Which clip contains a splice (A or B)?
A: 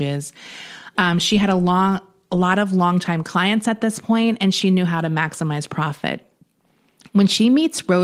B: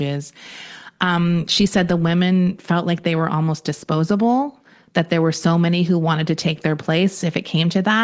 A